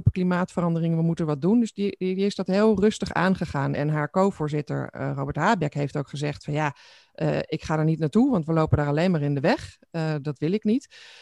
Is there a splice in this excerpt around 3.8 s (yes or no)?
yes